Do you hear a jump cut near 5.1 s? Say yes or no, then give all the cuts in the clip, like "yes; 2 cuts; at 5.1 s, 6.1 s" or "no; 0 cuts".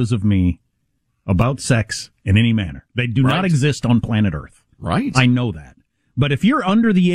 no; 0 cuts